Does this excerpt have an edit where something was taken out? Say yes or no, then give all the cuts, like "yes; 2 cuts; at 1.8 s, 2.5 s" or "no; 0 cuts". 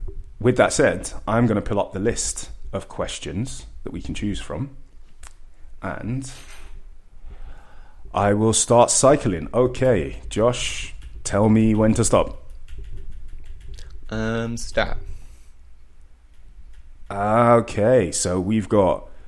no; 0 cuts